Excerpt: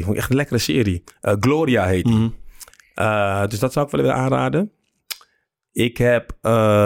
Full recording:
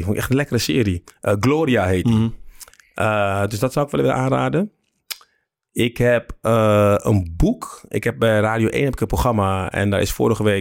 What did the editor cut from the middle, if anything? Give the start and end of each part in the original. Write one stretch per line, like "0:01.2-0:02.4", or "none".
none

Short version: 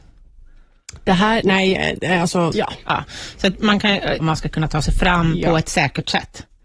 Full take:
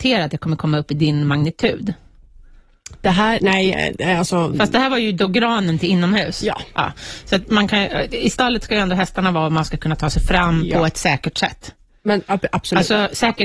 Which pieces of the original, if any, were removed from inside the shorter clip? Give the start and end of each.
0:04.5-0:06.4
0:08.1-0:09.5

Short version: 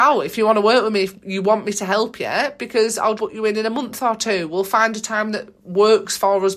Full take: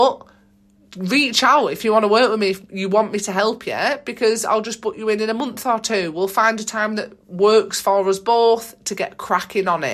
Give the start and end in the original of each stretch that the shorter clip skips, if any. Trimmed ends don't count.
0:04.6-0:04.8

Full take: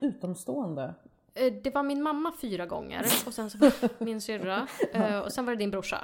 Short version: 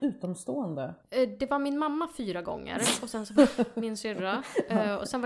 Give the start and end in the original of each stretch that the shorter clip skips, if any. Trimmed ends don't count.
0:01.0-0:01.3

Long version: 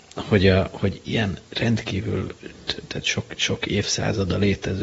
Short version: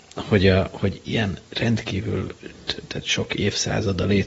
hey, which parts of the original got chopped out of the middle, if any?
0:03.0-0:03.4

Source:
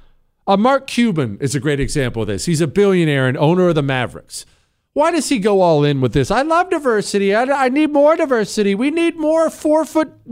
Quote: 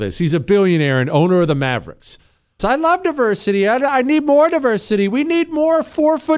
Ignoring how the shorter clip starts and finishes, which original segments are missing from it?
0:04.9-0:06.3

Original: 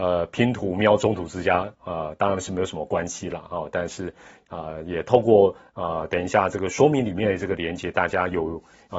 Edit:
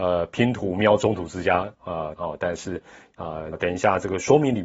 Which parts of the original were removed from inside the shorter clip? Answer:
0:02.2-0:03.5
0:04.8-0:06.0

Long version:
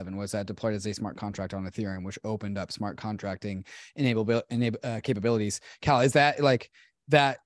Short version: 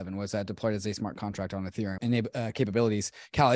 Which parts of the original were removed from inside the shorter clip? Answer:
0:02.0-0:04.5

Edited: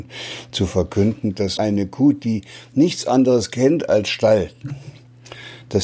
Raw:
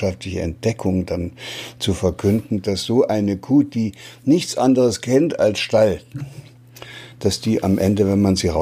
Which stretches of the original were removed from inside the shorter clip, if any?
0:02.8-0:03.1

